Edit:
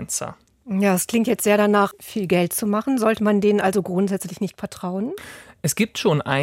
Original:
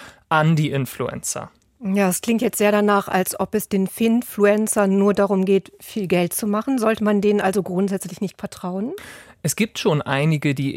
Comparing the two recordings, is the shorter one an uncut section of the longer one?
no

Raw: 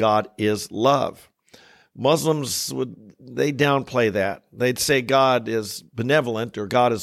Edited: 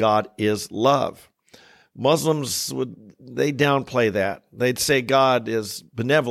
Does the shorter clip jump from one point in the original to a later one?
no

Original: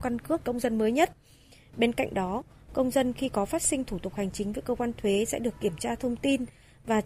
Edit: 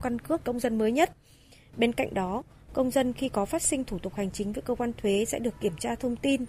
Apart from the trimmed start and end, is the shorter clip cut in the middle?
no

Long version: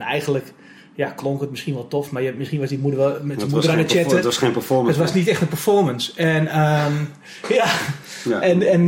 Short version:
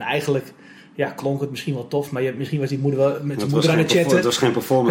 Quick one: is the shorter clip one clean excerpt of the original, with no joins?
yes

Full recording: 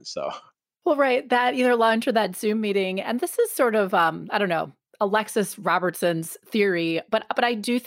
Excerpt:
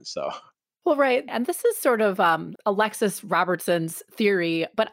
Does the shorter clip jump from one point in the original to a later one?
yes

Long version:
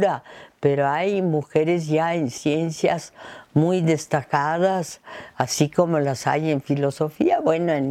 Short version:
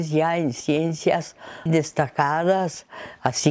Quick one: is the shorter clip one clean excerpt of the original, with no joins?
no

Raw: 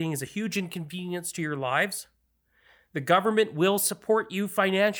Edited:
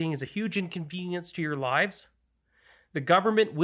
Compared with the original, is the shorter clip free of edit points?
yes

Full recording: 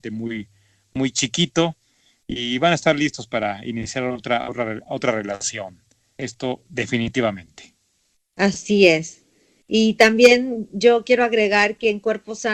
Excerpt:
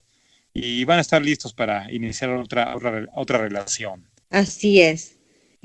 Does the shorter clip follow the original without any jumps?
no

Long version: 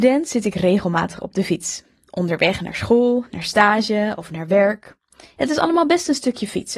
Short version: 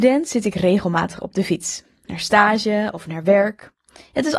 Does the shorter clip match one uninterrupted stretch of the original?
no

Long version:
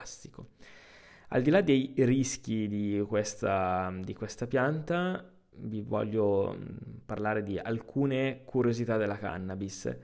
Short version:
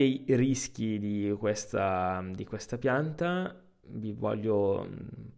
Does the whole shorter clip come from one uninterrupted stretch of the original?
yes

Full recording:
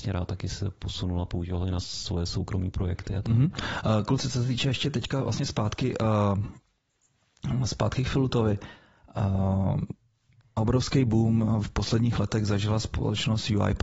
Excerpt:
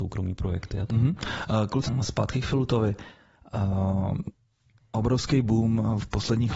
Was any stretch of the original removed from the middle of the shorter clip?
yes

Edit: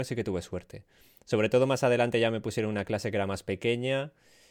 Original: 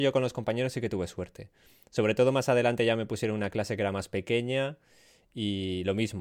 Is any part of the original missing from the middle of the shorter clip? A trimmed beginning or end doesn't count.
no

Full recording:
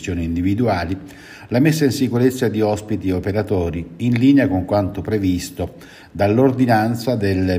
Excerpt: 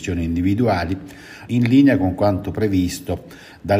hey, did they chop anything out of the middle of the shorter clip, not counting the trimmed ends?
yes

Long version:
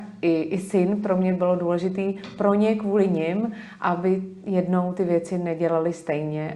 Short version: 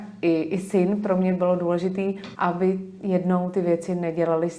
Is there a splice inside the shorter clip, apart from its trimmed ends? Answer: yes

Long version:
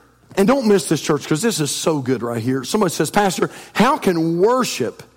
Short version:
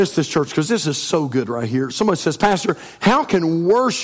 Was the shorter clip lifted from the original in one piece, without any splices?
yes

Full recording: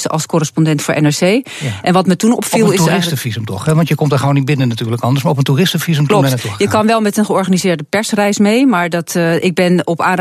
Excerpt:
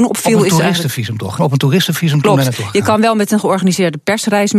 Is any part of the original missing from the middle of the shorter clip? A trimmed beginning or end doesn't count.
yes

